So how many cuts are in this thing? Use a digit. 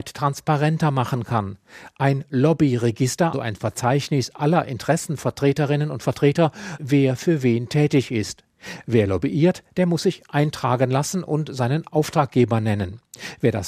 2